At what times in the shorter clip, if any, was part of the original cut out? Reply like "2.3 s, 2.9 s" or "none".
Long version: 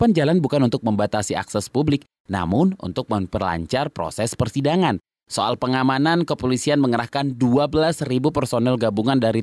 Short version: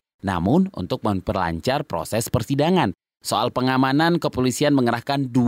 none